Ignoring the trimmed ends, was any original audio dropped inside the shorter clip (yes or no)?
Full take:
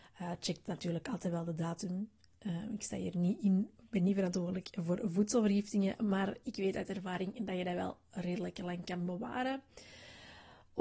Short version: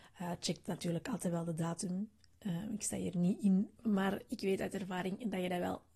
yes